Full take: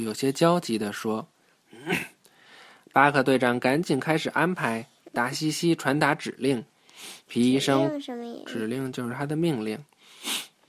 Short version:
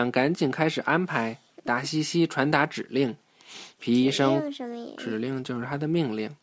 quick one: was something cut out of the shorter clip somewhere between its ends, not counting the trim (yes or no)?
no